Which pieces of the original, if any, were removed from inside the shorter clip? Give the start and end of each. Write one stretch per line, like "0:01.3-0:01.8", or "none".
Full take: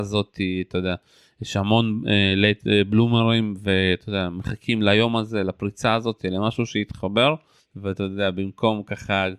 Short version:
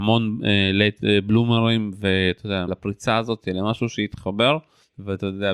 0:04.3-0:05.4